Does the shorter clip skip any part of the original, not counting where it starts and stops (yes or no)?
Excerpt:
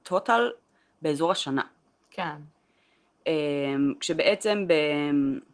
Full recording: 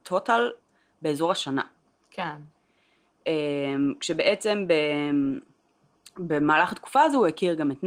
no